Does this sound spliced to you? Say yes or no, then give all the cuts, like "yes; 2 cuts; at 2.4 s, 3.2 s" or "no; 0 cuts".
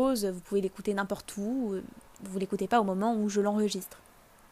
no; 0 cuts